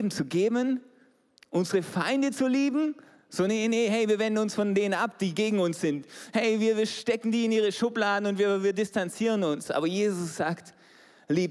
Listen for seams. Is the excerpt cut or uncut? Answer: uncut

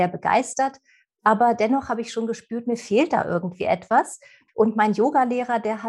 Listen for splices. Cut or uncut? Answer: cut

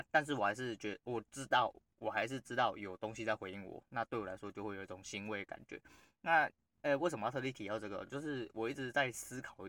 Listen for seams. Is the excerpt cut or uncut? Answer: uncut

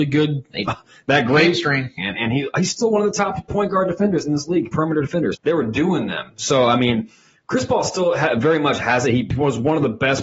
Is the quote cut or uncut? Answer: cut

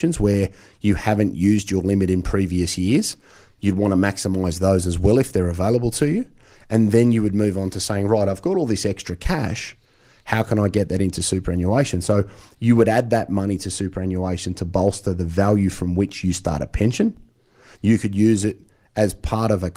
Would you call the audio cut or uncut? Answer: cut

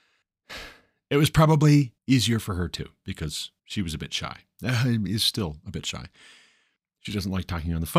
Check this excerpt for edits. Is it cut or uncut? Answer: cut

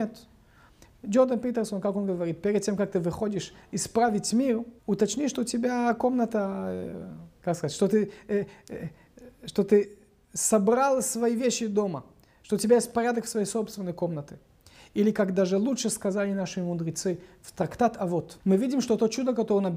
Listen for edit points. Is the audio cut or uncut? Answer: cut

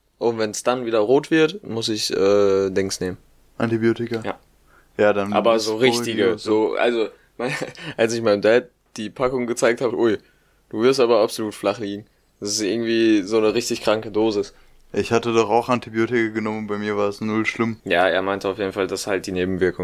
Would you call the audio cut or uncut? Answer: cut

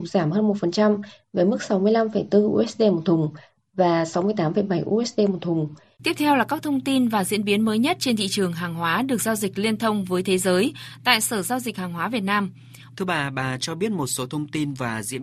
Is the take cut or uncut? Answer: cut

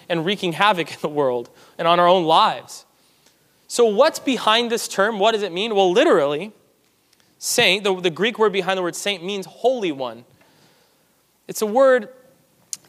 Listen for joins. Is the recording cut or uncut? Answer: uncut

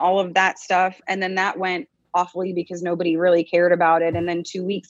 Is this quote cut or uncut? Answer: uncut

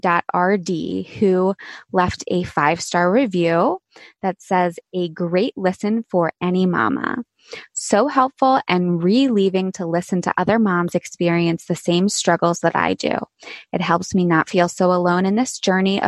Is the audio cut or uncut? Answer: uncut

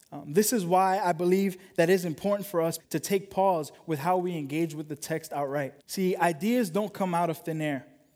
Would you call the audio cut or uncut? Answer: cut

